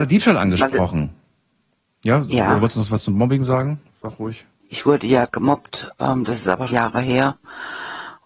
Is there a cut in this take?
yes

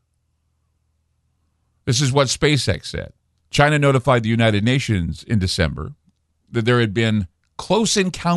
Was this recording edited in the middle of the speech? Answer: yes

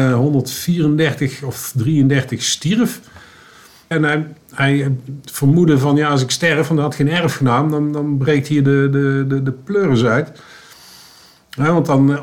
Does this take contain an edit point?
yes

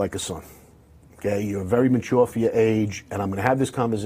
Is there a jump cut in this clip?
no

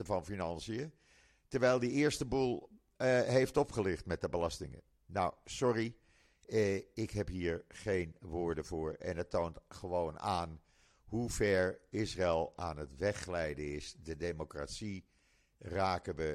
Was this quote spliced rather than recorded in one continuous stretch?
no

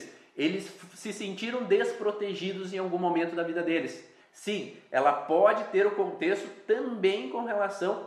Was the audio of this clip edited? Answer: yes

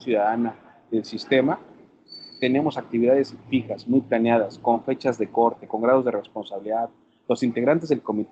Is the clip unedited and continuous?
no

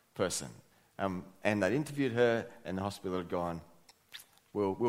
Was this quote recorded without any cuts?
yes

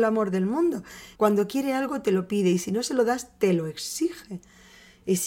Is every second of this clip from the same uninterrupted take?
no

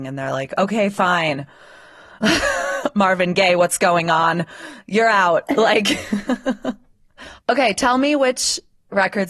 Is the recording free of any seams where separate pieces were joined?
yes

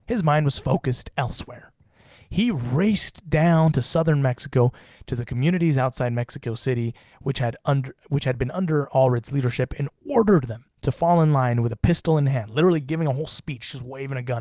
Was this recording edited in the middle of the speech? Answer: no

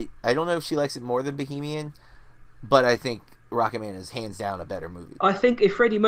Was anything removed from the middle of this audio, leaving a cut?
yes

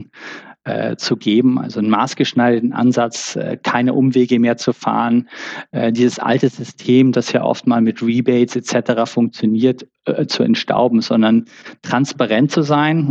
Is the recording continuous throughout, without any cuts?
yes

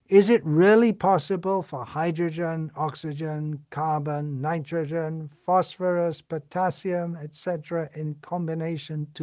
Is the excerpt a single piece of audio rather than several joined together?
yes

